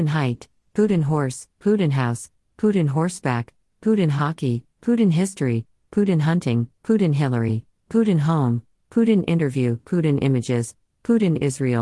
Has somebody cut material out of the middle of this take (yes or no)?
yes